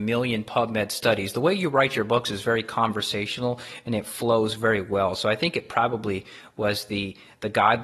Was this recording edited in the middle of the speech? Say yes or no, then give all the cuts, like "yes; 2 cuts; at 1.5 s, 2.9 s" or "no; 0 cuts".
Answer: no; 0 cuts